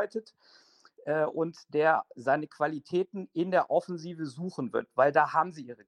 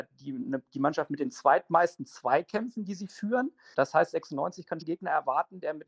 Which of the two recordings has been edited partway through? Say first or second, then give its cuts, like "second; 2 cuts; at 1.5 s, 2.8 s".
second; 2 cuts; at 3.7 s, 4.8 s